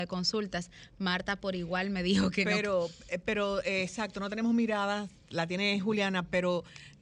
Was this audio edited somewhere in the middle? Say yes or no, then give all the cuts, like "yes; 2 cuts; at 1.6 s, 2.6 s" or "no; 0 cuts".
no; 0 cuts